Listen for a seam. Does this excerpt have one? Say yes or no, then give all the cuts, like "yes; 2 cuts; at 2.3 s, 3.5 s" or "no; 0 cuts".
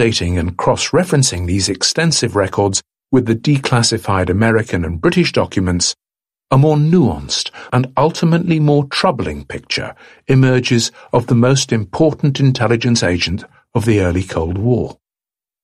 yes; 1 cut; at 7.7 s